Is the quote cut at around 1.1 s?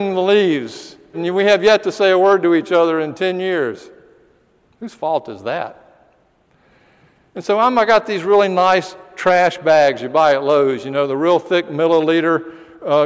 yes; 1 cut; at 1.1 s

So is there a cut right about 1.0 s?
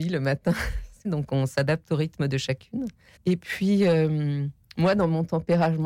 yes; 2 cuts; at 1.0 s, 3.2 s

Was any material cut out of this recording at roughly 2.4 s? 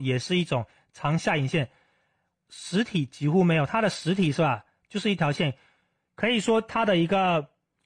yes; 2 cuts; at 2.4 s, 6.1 s

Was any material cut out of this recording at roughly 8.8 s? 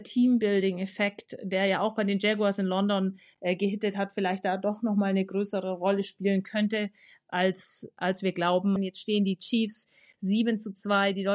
yes; 1 cut; at 8.8 s

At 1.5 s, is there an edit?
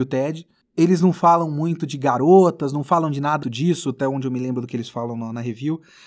no; 1 cut; at 3.4 s

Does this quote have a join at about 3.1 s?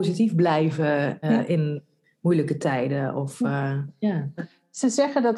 no; 2 cuts; at 1.2 s, 4.4 s

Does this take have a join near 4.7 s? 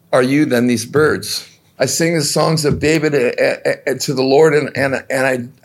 no; 1 cut; at 1.8 s

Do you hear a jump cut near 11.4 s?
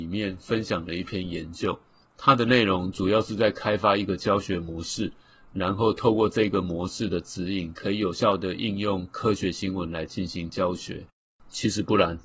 yes; 1 cut; at 11.4 s

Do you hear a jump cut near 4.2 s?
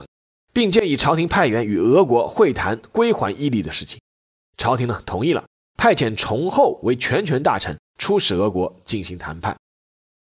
no; 0 cuts

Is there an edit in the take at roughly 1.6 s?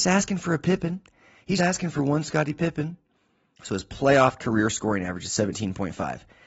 yes; 2 cuts; at 1.6 s, 3.5 s

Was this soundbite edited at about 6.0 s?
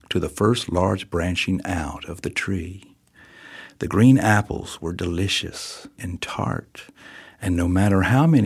yes; 1 cut; at 6.0 s

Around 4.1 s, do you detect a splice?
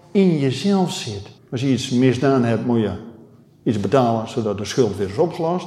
no; 1 cut; at 1.4 s

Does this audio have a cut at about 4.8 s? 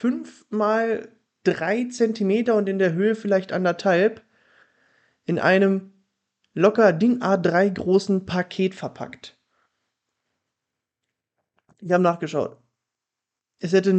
no; 0 cuts

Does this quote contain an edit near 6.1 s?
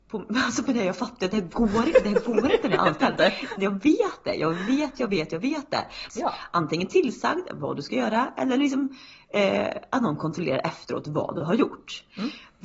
yes; 2 cuts; at 3.6 s, 6.1 s

